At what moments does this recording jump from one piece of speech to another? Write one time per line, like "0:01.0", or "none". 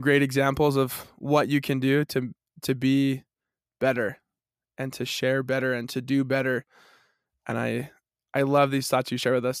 none